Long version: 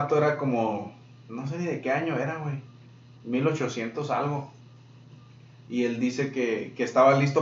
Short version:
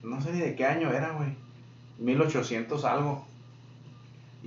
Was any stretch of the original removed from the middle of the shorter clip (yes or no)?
no